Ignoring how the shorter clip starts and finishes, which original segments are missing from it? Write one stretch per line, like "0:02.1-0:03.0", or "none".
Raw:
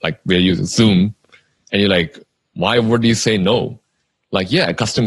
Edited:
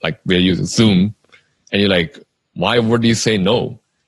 none